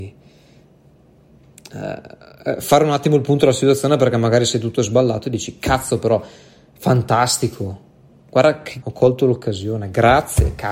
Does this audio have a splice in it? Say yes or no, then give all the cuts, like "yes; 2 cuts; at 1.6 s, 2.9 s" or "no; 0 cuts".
yes; 1 cut; at 8.8 s